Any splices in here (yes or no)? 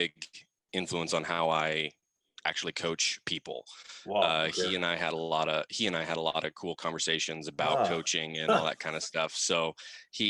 no